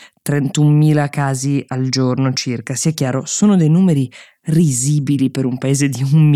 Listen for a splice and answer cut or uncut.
uncut